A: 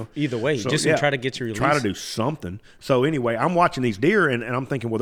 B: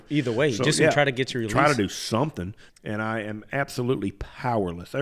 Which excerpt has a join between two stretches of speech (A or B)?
B